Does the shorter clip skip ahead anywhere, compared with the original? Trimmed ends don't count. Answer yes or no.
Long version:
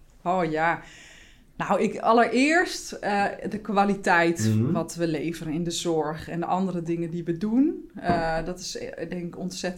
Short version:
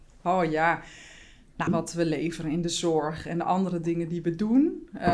yes